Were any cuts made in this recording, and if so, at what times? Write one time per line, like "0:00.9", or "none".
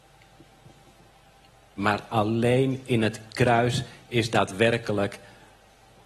0:01.8